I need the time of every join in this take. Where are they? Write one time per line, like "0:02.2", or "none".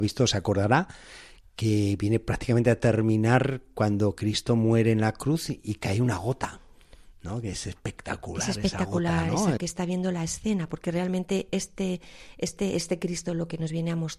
0:09.6